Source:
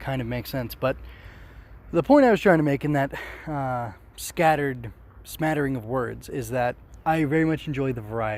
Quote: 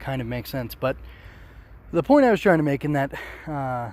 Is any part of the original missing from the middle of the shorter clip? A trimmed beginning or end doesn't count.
no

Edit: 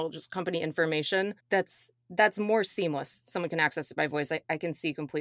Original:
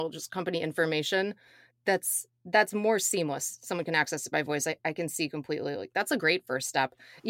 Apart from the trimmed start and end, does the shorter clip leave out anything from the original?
yes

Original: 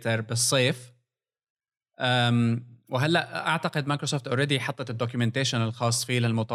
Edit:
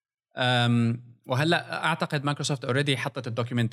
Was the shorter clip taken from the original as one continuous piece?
yes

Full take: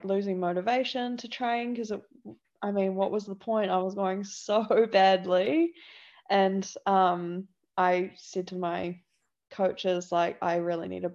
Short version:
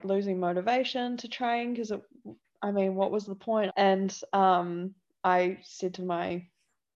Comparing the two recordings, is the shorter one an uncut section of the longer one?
no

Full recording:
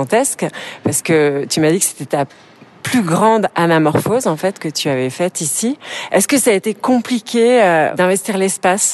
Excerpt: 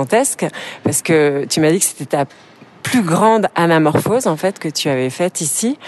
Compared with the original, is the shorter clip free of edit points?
yes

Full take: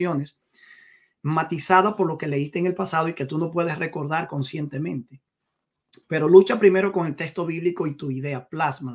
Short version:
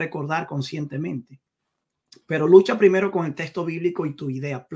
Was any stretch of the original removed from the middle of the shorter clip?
no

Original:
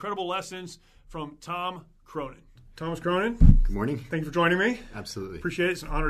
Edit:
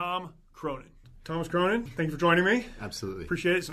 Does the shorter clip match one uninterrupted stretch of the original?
no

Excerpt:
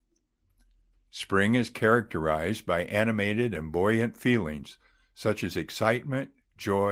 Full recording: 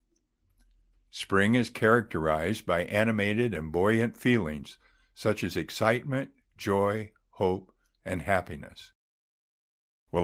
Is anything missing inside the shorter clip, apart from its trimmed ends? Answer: no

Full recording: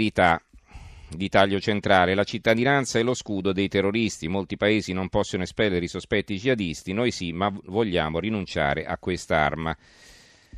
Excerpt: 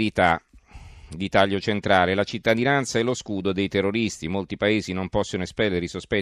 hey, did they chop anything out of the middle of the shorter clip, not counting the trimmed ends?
no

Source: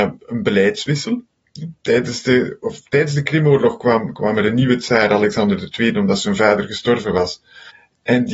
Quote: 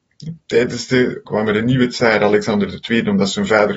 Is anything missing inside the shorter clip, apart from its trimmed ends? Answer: yes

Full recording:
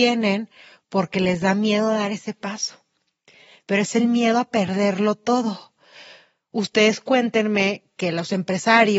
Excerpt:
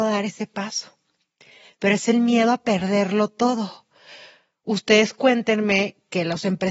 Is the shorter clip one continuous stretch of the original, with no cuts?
yes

